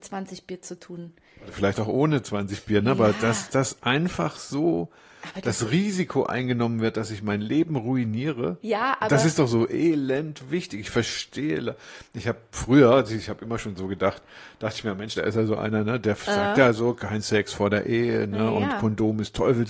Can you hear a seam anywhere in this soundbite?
yes; 2 cuts; at 8.6 s, 15.1 s

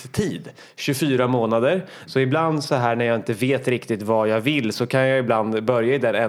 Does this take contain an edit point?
yes; 1 cut; at 2.1 s

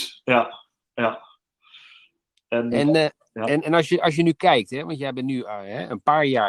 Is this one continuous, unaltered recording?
yes; 0 cuts

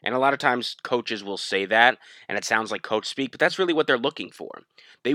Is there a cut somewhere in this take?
no; 0 cuts

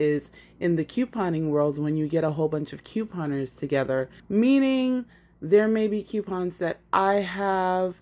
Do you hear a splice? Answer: yes; 1 cut; at 4.2 s

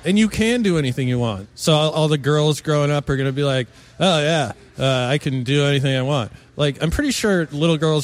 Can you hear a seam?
yes; 1 cut; at 1.4 s

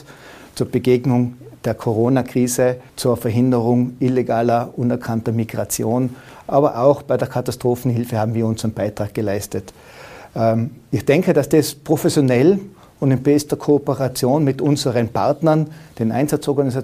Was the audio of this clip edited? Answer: yes; 1 cut; at 2.9 s

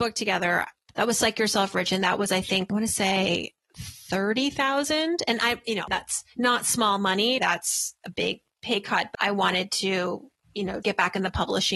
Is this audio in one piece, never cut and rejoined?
no; 3 cuts; at 7.4 s, 9.1 s, 10.8 s

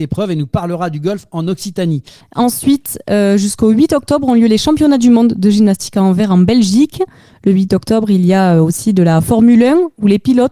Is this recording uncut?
no; 1 cut; at 2.2 s

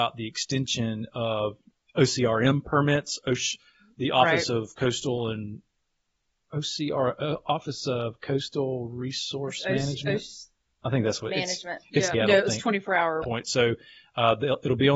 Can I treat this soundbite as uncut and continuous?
no; 2 cuts; at 12.1 s, 13.2 s

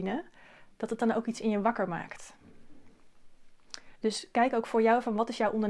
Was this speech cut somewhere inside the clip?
yes; 1 cut; at 3.9 s

